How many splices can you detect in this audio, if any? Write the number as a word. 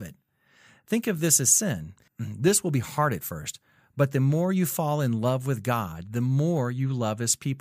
one